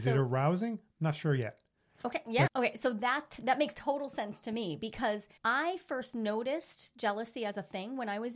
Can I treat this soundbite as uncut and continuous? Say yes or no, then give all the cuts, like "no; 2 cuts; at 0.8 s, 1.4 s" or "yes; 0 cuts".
no; 2 cuts; at 2.5 s, 5.4 s